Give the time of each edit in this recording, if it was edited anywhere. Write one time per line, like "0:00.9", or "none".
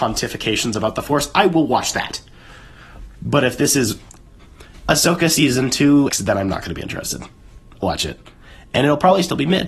0:06.1
0:07.8